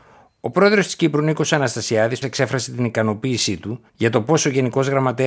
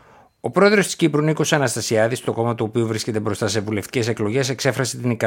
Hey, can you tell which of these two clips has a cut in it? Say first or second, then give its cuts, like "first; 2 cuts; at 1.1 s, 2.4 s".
first; 2 cuts; at 2.2 s, 3.9 s